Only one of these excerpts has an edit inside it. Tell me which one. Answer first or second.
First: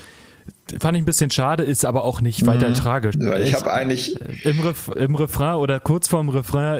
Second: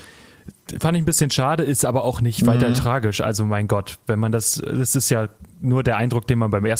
first